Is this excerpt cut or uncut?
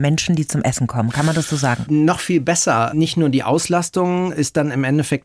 uncut